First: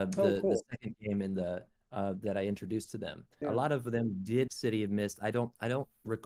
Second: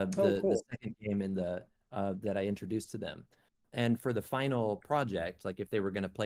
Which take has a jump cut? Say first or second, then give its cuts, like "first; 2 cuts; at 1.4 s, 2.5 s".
first; 2 cuts; at 3.4 s, 4.5 s